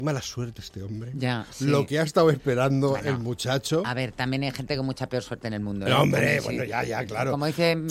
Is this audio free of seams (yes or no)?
yes